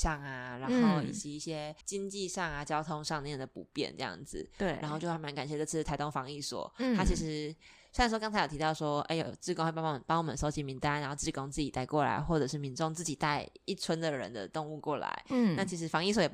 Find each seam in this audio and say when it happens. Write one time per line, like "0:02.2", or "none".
0:01.8